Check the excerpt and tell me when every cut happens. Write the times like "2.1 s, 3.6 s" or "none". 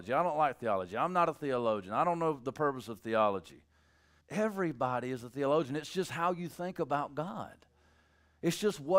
4.2 s